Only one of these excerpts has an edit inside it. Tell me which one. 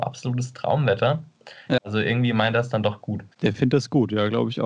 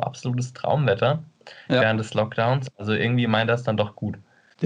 first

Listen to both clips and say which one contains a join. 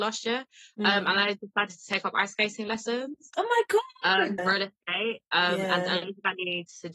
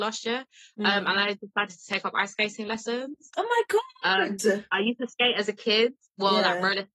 first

